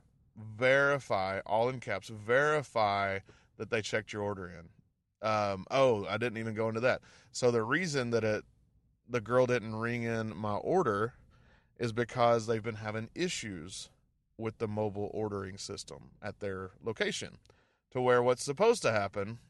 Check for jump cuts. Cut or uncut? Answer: uncut